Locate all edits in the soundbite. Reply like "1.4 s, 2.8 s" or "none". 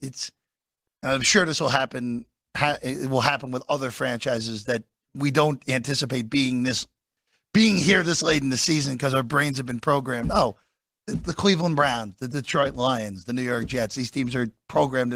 none